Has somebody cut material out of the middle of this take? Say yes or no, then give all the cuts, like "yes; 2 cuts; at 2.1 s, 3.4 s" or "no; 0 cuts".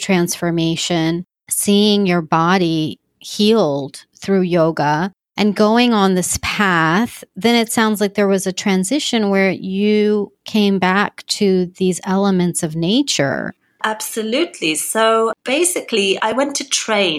no; 0 cuts